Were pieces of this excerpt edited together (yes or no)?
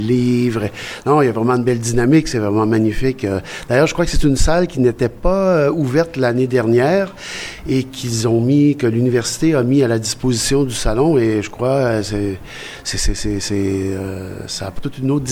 no